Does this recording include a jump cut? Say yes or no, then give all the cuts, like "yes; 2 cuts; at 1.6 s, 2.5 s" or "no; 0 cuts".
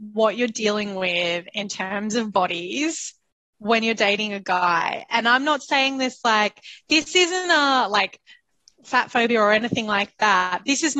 yes; 1 cut; at 3.4 s